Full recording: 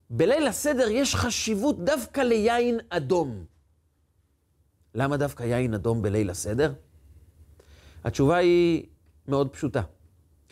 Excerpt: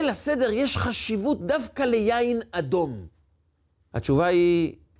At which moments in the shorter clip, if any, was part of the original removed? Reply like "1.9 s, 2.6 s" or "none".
3.9 s

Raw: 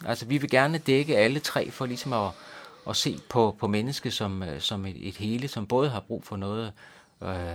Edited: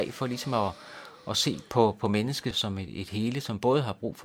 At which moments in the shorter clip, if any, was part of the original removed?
2.5 s

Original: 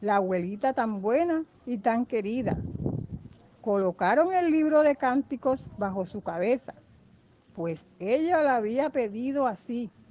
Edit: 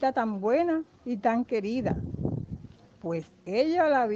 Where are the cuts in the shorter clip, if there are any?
2.9 s

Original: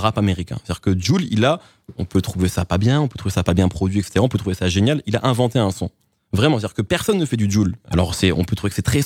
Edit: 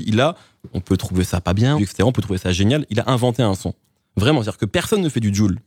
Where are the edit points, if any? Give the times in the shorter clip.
1.8 s

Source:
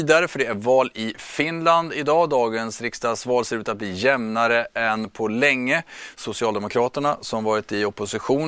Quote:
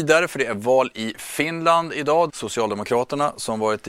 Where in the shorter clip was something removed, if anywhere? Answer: 2.3 s

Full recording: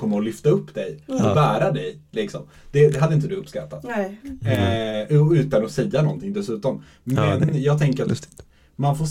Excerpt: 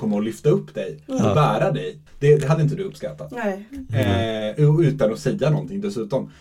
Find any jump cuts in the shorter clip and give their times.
2.1 s

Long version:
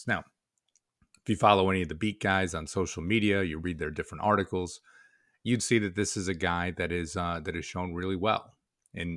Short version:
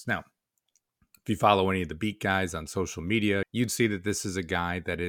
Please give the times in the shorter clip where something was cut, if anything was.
3.4 s

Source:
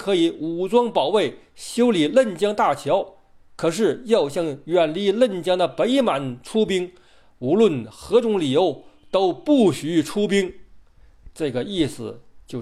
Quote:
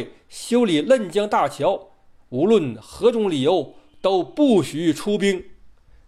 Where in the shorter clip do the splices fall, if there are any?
2.2 s

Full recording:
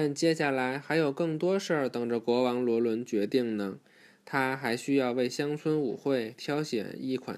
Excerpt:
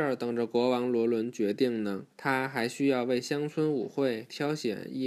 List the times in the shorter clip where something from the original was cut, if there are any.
2.1 s

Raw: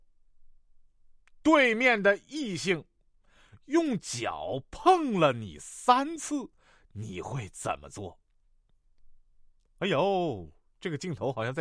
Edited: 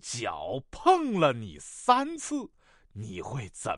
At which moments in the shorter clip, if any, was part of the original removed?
none

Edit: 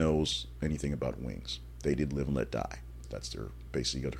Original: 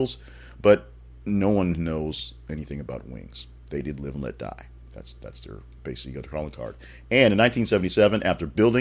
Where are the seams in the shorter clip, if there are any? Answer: 3.0 s

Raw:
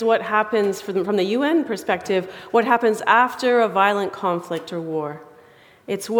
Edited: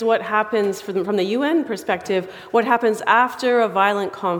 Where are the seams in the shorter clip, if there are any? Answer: none

